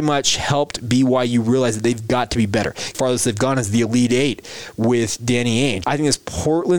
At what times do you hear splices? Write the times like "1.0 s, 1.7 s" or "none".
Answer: 2.9 s, 5.8 s

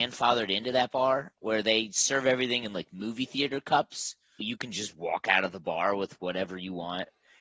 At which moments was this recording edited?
4.4 s

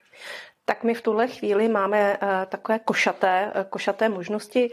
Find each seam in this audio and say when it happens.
none

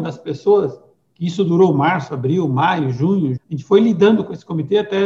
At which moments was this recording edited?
3.4 s

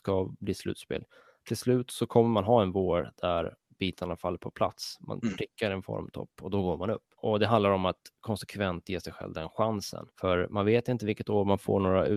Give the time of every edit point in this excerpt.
10.1 s

